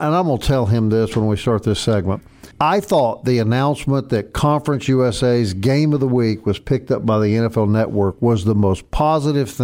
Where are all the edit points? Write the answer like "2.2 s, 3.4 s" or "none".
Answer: 2.5 s